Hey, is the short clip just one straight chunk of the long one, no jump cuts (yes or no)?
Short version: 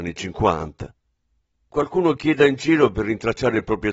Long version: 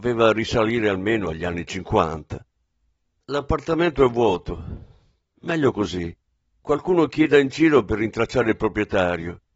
no